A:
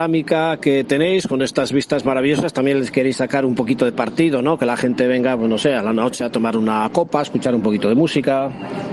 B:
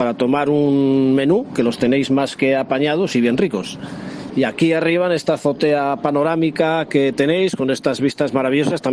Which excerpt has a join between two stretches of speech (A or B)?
B